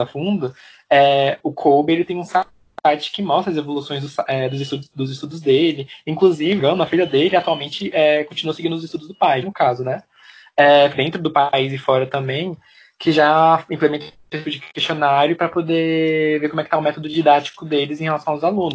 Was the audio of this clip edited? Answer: yes; 3 cuts; at 9.4 s, 10.9 s, 14.4 s

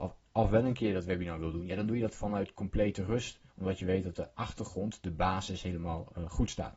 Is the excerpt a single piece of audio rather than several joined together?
no; 1 cut; at 3.5 s

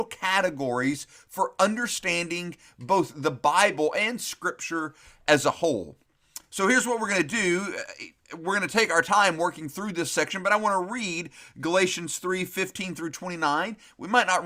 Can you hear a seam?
no; 0 cuts

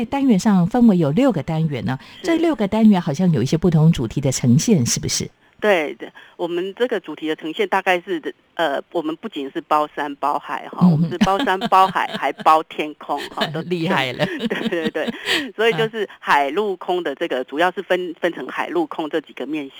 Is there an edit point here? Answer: no; 0 cuts

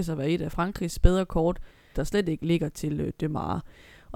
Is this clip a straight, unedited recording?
no; 1 cut; at 1.9 s

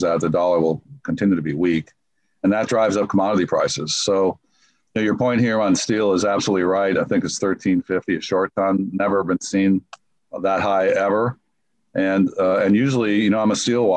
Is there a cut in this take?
no; 0 cuts

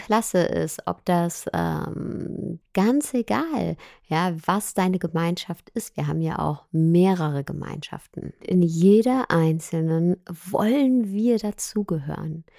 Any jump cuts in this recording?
yes; 1 cut; at 2.6 s

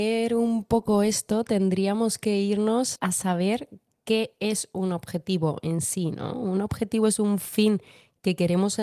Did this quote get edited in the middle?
yes; 1 cut; at 3.0 s

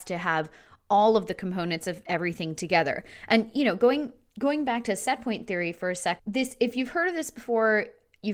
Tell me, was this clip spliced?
yes; 1 cut; at 6.2 s

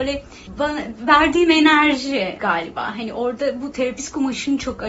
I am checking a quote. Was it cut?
no; 0 cuts

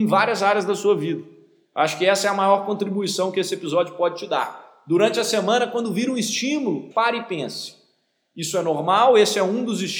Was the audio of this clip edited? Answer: yes; 1 cut; at 6.9 s

